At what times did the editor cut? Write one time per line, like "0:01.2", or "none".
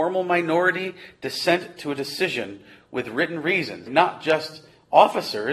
0:03.9